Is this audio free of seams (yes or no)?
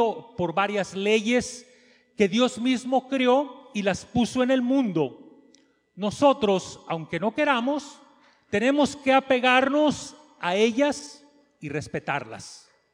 yes